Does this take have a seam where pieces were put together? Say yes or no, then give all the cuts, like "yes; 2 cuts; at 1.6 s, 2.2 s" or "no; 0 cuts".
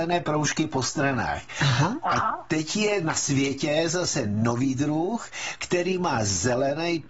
no; 0 cuts